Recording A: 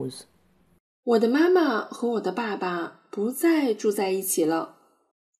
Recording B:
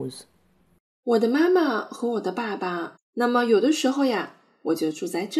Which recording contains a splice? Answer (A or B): B